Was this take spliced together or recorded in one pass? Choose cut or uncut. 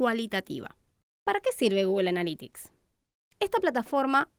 cut